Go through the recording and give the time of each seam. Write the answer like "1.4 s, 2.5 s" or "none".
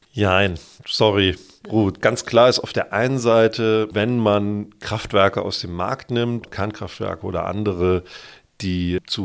2.0 s, 6.4 s